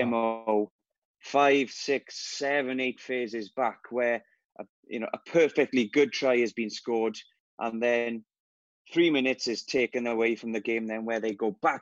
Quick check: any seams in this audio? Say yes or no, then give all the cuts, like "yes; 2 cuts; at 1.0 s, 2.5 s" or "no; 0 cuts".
yes; 1 cut; at 7.4 s